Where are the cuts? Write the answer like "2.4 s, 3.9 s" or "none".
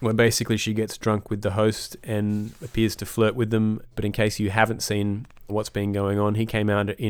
3.9 s, 5.5 s